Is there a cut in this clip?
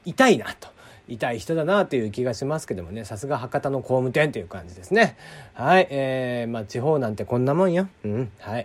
no; 0 cuts

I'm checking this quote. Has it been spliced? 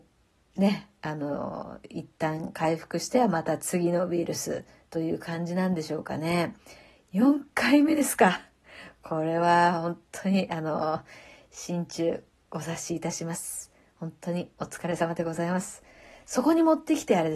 no; 0 cuts

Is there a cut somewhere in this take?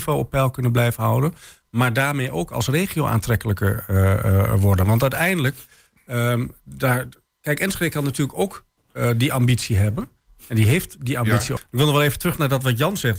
yes; 1 cut; at 11.6 s

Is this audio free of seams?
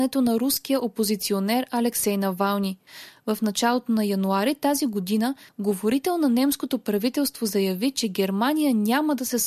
no; 1 cut; at 3.2 s

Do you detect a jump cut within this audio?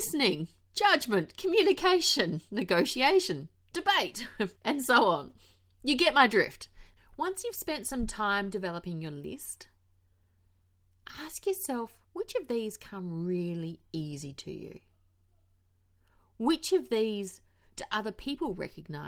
yes; 3 cuts; at 4.5 s, 7.0 s, 12.1 s

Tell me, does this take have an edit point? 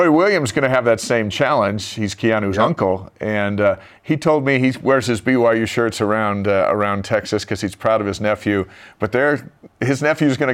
no; 0 cuts

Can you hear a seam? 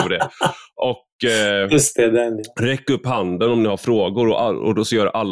no; 0 cuts

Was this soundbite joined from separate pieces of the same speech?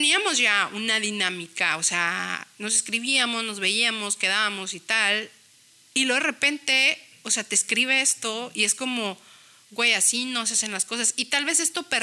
no; 0 cuts

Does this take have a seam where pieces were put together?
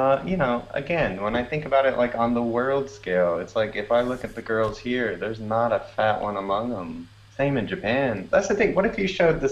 no; 0 cuts

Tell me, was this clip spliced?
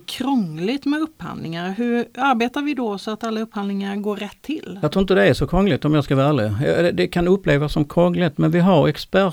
no; 0 cuts

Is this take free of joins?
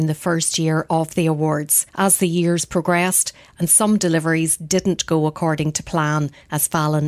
no; 2 cuts; at 1.9 s, 3.4 s

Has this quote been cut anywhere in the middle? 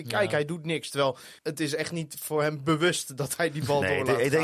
yes; 1 cut; at 1.4 s

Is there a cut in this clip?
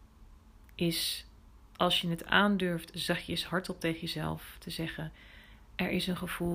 no; 0 cuts

